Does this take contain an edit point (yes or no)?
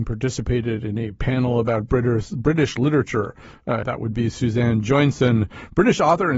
yes